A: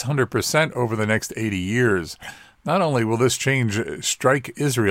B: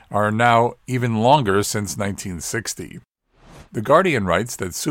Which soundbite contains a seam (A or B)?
B